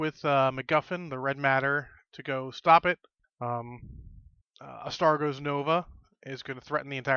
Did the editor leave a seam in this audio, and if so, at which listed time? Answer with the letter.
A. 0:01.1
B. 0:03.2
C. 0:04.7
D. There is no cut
B